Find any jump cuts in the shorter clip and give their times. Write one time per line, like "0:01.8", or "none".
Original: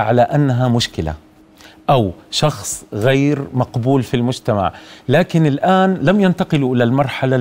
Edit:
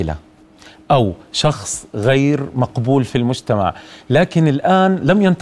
none